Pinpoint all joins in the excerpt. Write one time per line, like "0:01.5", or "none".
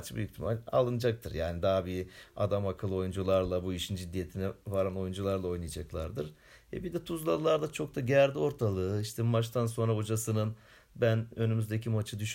none